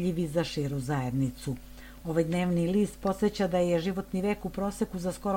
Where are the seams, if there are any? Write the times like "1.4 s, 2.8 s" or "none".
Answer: none